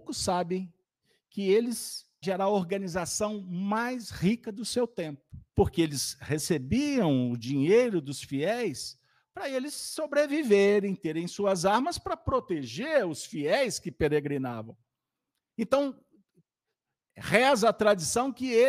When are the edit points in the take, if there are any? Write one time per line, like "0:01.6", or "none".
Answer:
0:02.2
0:05.5